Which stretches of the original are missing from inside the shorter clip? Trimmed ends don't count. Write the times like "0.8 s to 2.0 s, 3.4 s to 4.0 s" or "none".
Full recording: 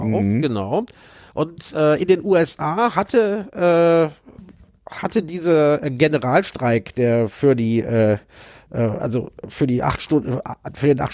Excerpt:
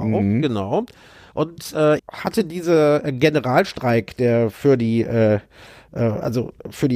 2.0 s to 4.8 s

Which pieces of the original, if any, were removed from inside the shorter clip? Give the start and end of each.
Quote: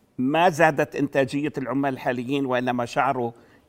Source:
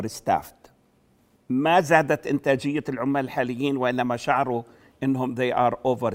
none

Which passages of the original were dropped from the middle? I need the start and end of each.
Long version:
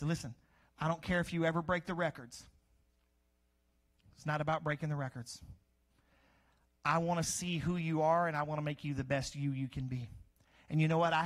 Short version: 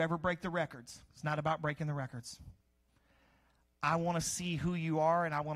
2.5 s to 4.1 s

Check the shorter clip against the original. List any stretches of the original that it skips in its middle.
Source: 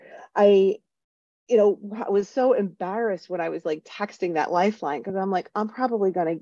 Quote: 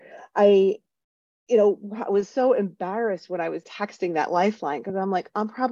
3.6 s to 3.8 s

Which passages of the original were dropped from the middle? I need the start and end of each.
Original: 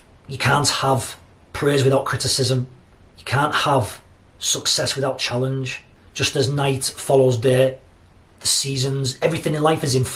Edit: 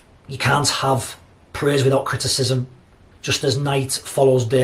3.1 s to 6.0 s

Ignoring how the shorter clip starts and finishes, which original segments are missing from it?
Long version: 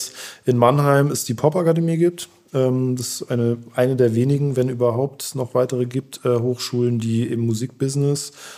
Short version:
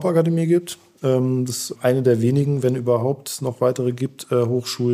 3.3 s to 3.7 s

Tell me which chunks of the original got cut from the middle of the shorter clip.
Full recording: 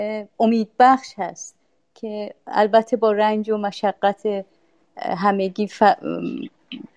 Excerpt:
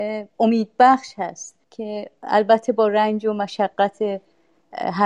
1.6 s to 1.9 s

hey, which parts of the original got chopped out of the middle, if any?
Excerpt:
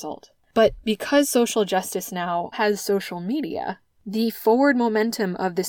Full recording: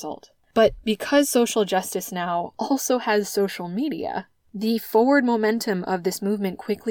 2.5 s to 3.0 s

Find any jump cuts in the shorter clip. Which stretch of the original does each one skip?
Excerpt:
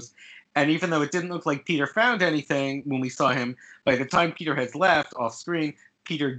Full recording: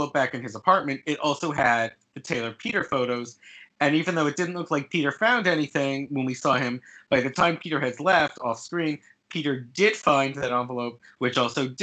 none

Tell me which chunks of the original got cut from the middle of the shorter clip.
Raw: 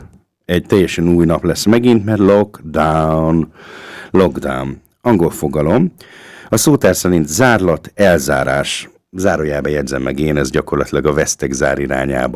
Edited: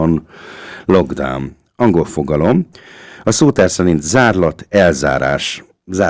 none

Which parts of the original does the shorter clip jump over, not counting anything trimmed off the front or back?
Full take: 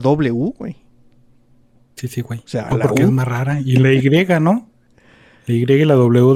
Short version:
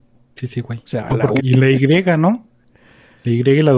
3.0 s to 3.6 s

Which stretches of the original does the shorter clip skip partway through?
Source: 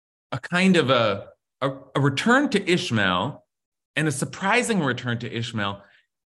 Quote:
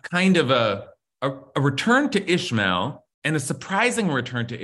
3.5 s to 3.8 s

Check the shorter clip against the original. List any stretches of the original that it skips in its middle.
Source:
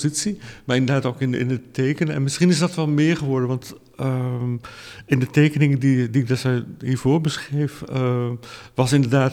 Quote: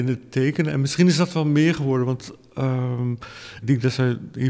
5.0 s to 6.1 s

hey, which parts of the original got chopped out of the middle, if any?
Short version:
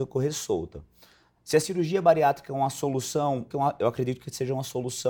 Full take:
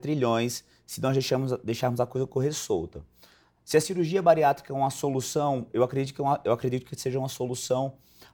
5.7 s to 6.2 s

